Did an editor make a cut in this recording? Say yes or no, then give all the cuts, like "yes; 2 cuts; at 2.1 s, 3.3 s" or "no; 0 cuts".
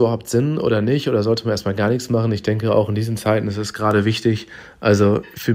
no; 0 cuts